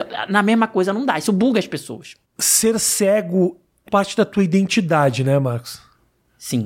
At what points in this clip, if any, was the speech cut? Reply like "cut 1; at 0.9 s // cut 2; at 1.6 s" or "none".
cut 1; at 2.2 s // cut 2; at 3.9 s